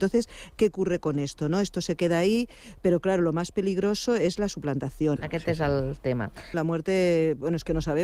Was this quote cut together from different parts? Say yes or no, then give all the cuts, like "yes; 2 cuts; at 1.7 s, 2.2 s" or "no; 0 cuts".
yes; 2 cuts; at 5.2 s, 6.5 s